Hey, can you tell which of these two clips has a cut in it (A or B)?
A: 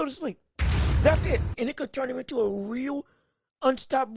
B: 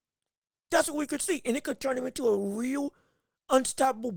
A